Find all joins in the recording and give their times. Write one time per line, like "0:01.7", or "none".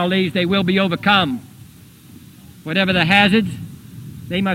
none